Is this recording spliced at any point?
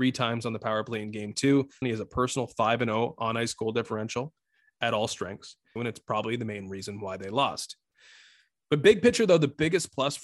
yes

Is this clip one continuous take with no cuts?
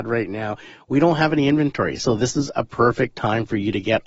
yes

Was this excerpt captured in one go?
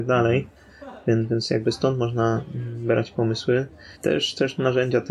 no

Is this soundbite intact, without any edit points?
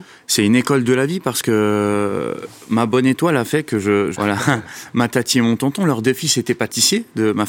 no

